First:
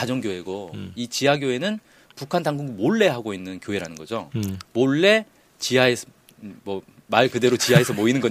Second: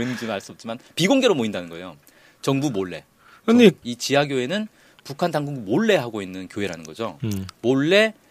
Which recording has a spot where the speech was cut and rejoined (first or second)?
second